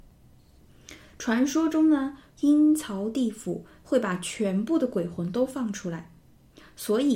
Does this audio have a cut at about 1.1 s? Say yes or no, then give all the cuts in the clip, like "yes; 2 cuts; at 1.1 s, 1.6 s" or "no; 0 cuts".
no; 1 cut; at 2.3 s